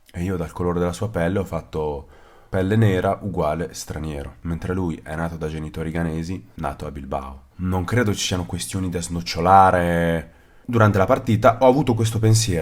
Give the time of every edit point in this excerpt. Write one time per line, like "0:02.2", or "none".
0:07.5